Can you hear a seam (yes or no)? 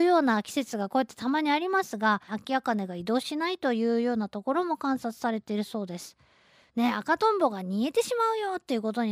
yes